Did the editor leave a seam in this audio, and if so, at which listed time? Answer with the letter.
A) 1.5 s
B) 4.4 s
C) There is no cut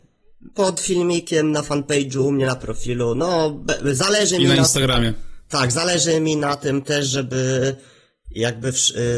C